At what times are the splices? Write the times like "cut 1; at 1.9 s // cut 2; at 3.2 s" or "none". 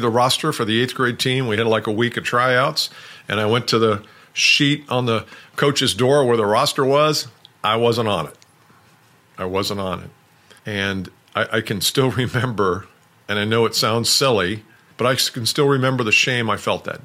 cut 1; at 10.6 s // cut 2; at 14.9 s